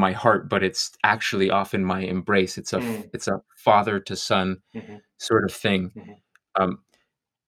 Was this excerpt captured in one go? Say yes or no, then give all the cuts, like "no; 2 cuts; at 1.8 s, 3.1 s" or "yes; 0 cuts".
yes; 0 cuts